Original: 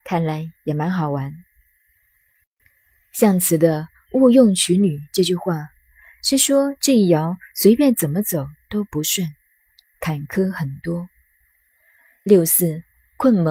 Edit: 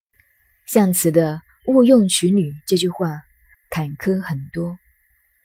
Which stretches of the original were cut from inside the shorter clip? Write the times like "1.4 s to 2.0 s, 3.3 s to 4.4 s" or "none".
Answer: 6.0 s to 9.8 s